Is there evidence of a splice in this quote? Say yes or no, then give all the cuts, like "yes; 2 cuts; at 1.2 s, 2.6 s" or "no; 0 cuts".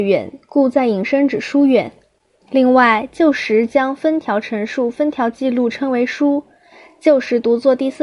no; 0 cuts